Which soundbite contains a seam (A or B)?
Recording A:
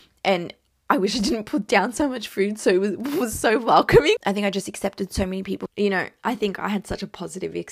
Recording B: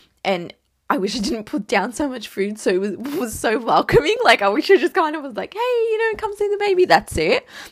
A